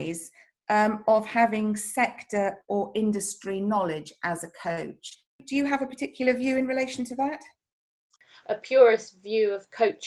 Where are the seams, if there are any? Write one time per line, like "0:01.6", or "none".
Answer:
none